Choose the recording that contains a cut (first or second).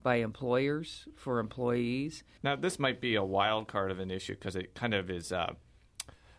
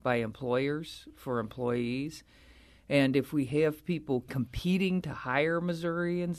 first